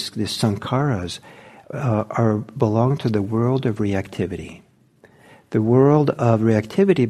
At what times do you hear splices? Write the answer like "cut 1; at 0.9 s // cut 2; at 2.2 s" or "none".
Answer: none